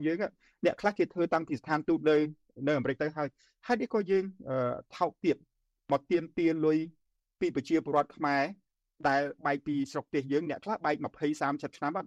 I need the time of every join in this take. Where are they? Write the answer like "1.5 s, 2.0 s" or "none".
none

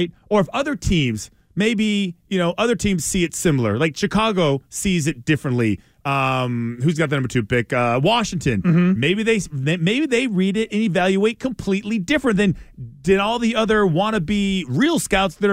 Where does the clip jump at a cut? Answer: none

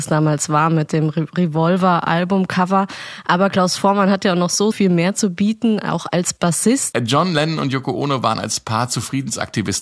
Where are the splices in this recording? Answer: 4.7 s, 6.9 s

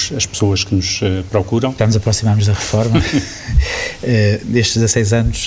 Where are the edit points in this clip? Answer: 1.8 s

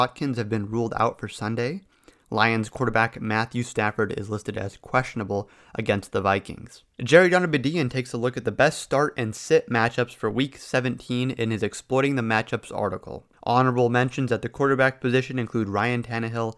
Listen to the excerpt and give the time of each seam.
13.3 s

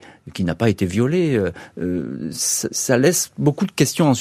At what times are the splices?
none

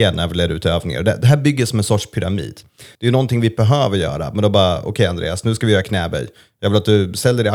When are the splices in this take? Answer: 3.0 s

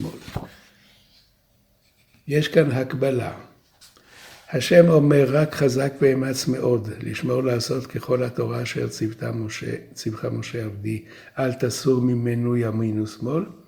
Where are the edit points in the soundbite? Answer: none

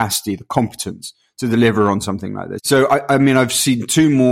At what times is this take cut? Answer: 2.6 s

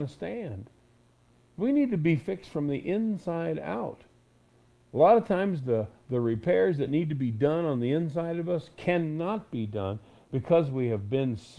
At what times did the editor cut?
none

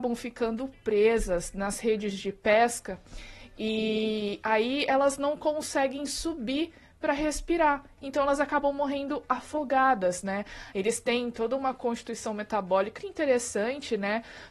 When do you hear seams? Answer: 10.7 s, 13.0 s

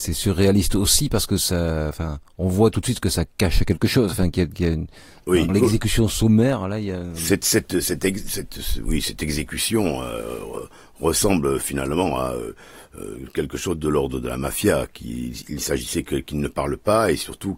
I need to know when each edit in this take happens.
5.5 s

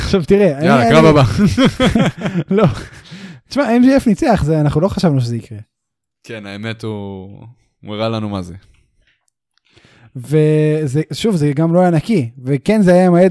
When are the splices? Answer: none

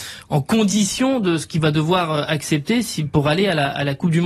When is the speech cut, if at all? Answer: none

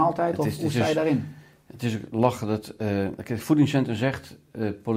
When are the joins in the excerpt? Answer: none

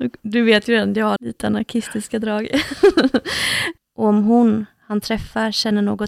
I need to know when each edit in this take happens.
1.2 s, 3.8 s

